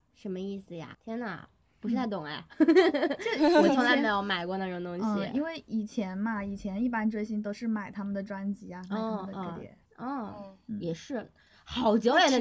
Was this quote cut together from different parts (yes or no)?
yes